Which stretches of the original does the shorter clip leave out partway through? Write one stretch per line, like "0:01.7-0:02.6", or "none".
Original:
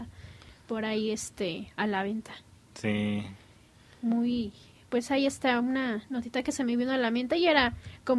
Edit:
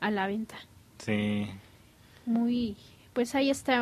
none